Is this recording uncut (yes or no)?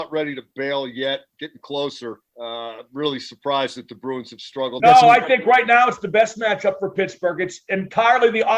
no